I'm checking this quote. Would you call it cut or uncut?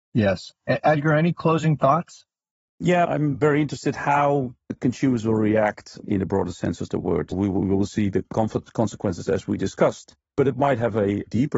cut